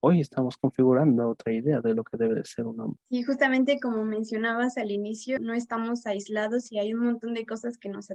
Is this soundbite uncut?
no; 2 cuts; at 3.1 s, 5.4 s

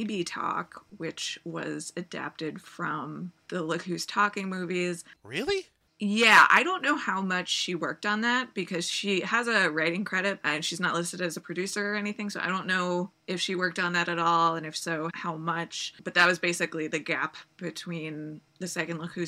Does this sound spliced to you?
yes; 2 cuts; at 10.4 s, 15.1 s

